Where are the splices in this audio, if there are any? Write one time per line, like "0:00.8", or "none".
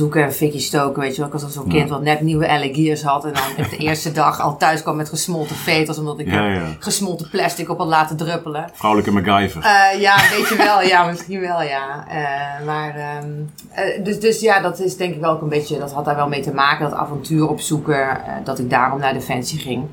none